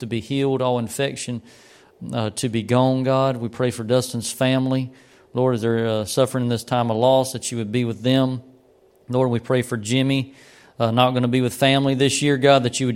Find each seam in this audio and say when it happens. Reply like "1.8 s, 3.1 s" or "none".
none